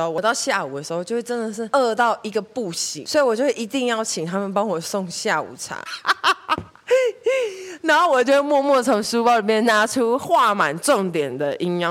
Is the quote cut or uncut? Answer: cut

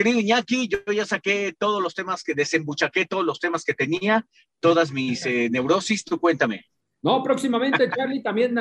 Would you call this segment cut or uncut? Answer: uncut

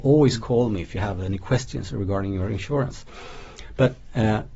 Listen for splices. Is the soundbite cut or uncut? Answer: uncut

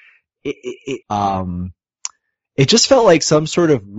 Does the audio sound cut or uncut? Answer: cut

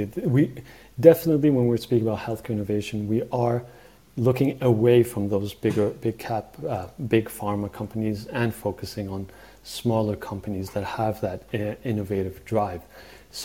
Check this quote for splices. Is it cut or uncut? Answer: uncut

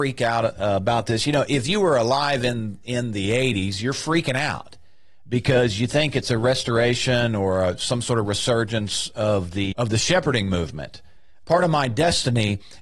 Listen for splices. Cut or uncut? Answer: cut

